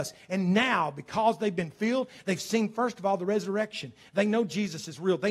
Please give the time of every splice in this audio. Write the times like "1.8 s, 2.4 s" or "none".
none